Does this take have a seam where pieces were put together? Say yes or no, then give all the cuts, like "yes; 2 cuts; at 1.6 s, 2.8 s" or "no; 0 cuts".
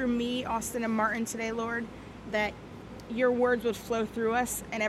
no; 0 cuts